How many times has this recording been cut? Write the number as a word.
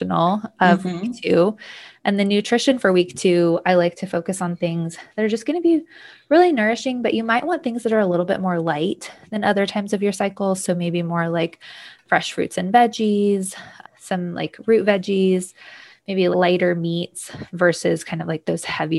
two